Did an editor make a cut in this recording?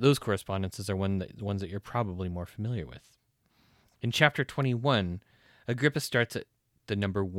no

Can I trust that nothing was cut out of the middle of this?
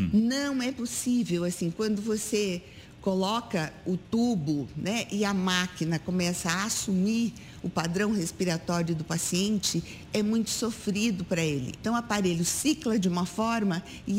no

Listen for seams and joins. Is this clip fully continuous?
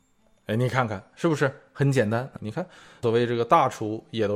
no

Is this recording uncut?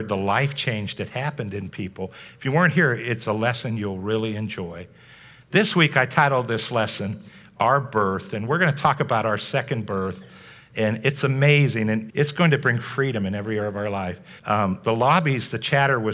no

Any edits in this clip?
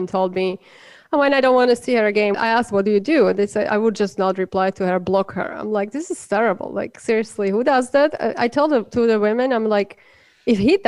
yes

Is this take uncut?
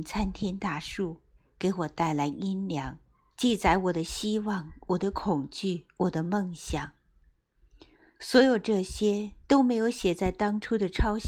no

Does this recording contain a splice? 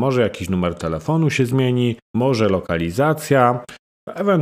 yes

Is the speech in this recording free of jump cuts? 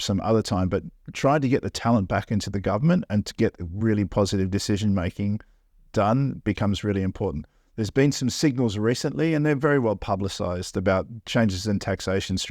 yes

